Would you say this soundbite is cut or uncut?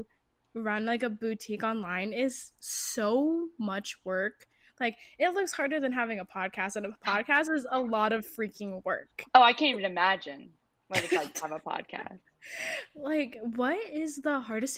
uncut